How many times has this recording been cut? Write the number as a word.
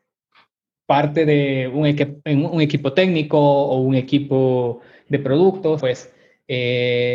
one